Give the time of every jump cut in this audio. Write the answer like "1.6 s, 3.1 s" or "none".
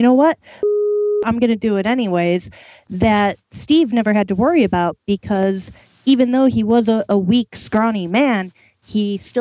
none